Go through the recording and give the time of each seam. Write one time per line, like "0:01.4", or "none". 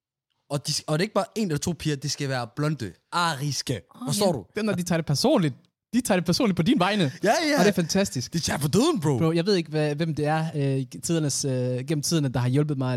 0:04.5